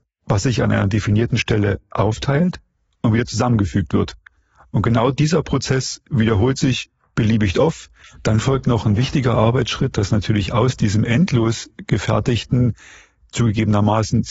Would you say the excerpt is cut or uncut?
uncut